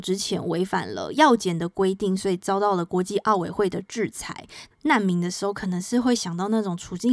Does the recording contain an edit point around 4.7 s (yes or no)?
yes